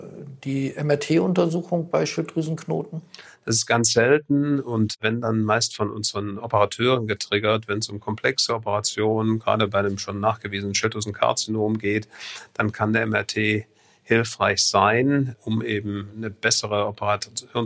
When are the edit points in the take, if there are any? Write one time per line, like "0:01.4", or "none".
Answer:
none